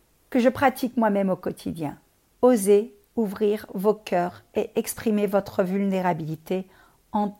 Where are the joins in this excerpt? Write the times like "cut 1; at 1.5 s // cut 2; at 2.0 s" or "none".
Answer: cut 1; at 2.2 s